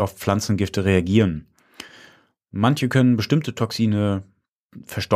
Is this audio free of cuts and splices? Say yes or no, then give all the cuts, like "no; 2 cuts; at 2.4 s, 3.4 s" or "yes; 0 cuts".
yes; 0 cuts